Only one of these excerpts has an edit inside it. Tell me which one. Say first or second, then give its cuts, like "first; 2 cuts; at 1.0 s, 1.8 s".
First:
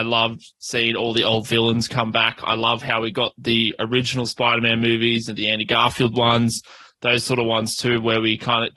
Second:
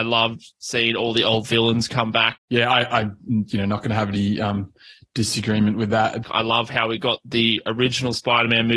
second; 2 cuts; at 2.4 s, 6.2 s